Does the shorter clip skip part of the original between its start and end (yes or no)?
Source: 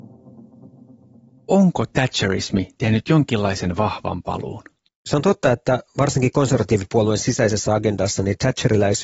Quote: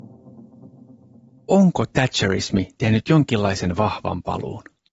no